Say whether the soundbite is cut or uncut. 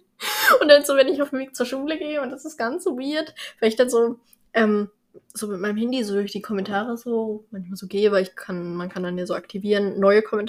uncut